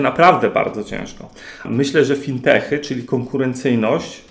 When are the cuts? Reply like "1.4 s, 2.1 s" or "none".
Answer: 1.6 s